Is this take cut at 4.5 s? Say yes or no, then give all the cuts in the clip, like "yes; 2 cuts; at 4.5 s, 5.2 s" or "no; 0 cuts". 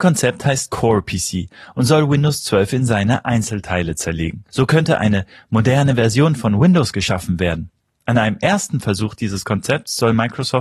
yes; 1 cut; at 4.5 s